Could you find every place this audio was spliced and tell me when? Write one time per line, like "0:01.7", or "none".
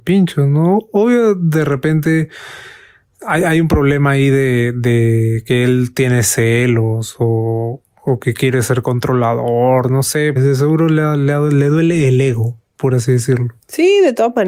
0:10.4

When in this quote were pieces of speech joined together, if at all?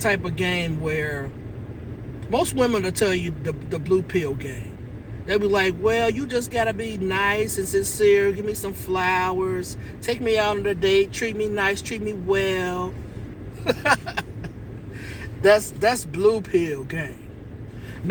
none

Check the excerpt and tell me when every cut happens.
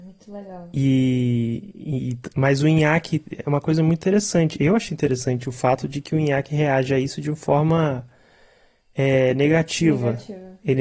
0:04.9

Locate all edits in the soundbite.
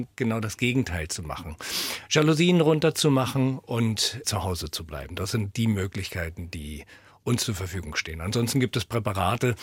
0:04.2

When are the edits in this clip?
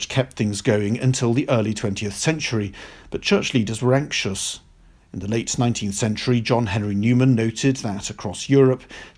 none

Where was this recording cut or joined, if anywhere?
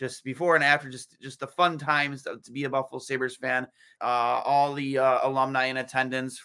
0:04.0

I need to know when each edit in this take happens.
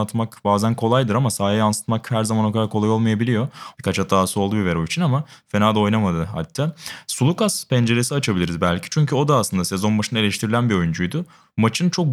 0:03.7

